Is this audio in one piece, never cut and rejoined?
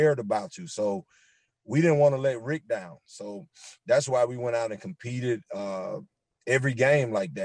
yes; 0 cuts

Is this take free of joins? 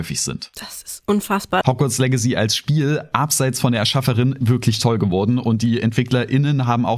no; 2 cuts; at 1.6 s, 4.4 s

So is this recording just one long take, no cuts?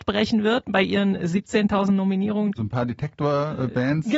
no; 1 cut; at 2.6 s

